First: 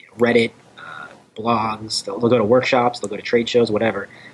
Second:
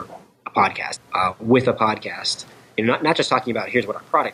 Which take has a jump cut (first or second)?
second